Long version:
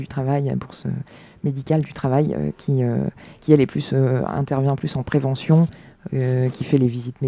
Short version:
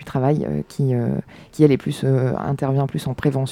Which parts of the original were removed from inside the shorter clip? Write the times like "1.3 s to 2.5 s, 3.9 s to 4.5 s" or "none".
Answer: none